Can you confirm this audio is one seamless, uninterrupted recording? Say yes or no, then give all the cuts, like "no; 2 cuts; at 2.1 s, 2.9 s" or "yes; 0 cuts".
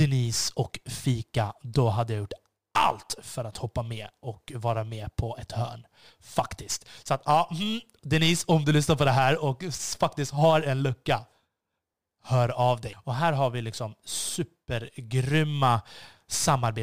no; 1 cut; at 12.9 s